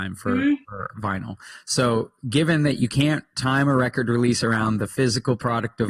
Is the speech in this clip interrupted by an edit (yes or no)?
no